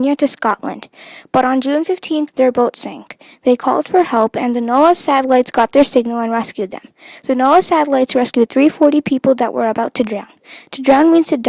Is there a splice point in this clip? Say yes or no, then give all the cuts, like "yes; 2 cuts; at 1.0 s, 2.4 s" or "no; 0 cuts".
yes; 1 cut; at 2.3 s